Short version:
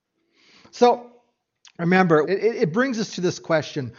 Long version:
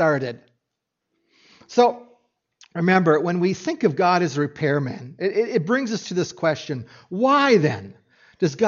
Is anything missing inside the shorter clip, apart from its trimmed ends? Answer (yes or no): yes